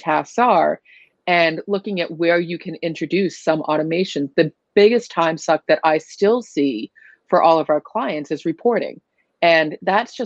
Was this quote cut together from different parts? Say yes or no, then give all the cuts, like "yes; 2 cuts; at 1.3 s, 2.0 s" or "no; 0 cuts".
no; 0 cuts